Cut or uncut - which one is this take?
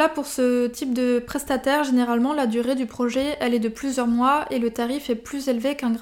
uncut